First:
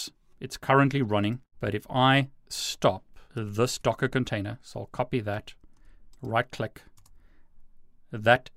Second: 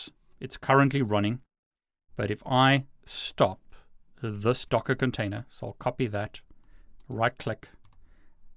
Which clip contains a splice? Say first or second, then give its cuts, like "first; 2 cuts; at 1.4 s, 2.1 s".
first; 2 cuts; at 1.5 s, 3.3 s